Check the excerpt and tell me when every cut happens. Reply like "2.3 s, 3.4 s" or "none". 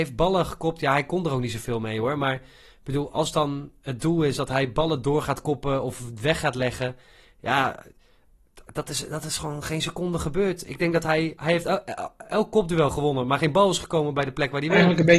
none